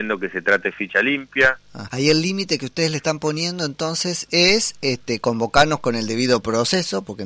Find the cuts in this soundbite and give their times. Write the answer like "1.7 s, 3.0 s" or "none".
1.9 s